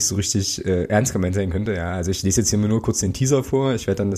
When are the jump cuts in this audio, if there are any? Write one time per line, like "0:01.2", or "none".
none